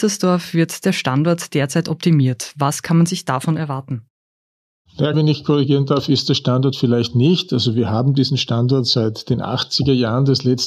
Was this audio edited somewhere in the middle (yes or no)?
yes